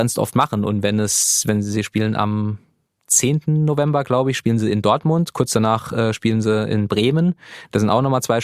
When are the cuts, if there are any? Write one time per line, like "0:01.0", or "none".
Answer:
none